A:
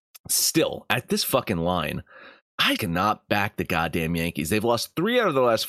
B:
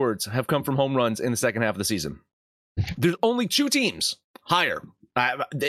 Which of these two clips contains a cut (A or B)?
A